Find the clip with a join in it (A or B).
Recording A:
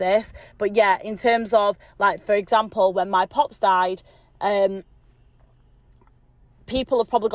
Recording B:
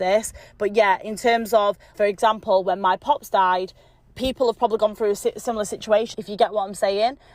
B